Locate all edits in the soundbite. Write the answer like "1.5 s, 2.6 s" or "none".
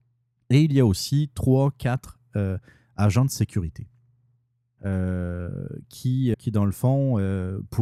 4.8 s, 6.3 s